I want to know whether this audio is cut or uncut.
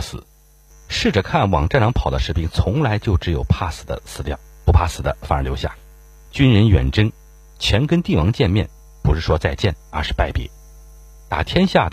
uncut